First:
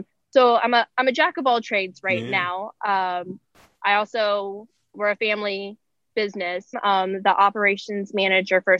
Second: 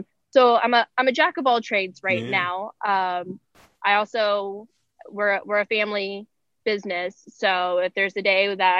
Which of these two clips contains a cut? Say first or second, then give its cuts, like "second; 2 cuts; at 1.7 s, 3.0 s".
first; 2 cuts; at 4.9 s, 6.7 s